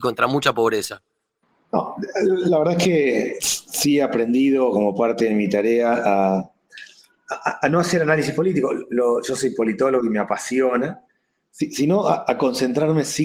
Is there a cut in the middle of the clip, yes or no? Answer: no